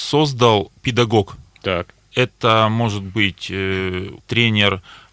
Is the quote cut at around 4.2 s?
yes; 2 cuts; at 1.5 s, 4.2 s

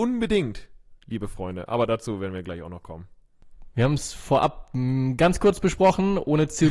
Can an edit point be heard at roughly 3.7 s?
yes; 1 cut; at 3.7 s

